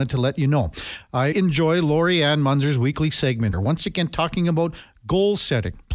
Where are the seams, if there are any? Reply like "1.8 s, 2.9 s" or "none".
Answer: 1.3 s, 3.5 s